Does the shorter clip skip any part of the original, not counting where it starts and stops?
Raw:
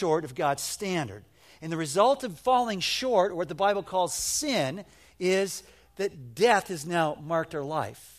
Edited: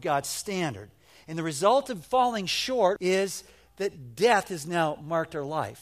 yes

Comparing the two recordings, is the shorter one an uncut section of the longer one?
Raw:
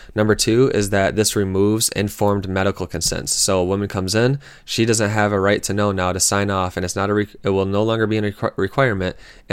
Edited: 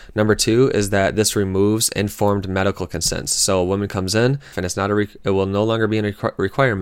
no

